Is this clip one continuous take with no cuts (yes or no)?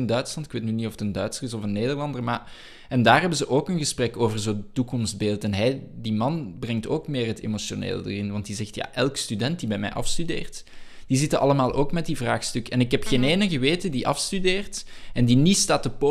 yes